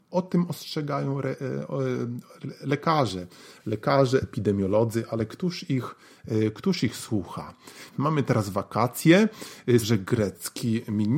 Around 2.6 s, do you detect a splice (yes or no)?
no